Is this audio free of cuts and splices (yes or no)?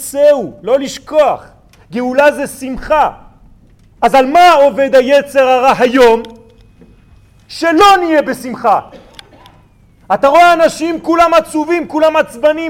yes